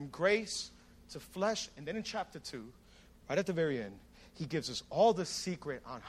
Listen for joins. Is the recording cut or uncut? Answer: uncut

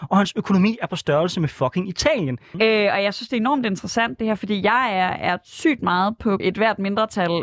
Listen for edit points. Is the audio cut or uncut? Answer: cut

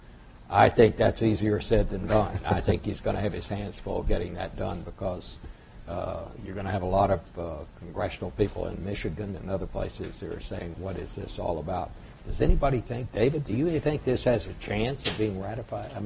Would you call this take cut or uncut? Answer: cut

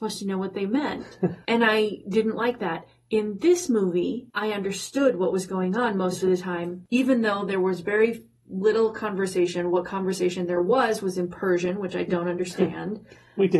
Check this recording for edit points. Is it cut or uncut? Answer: uncut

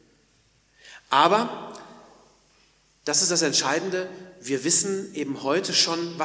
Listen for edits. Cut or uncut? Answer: uncut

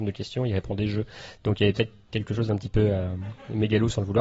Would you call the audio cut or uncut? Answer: uncut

